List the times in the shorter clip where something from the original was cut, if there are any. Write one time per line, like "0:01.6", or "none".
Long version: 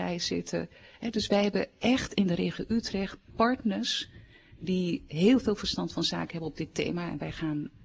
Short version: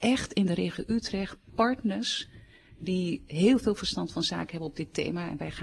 none